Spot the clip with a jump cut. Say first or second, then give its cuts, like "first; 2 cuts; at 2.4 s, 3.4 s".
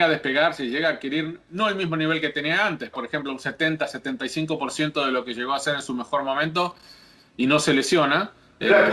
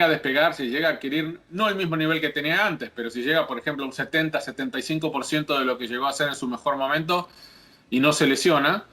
first; 1 cut; at 2.9 s